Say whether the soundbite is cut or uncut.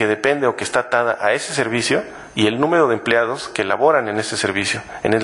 uncut